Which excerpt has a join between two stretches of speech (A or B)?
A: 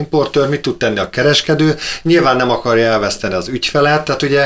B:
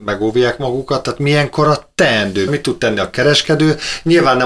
B